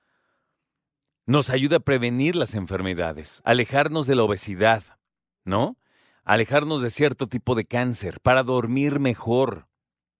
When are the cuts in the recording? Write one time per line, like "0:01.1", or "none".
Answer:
none